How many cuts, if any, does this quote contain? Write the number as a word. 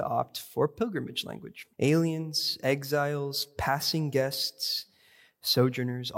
one